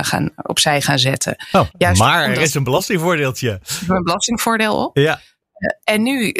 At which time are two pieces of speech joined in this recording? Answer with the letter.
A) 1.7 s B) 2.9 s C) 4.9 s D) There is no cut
A